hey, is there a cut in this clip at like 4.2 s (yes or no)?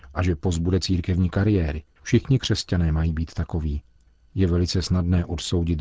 no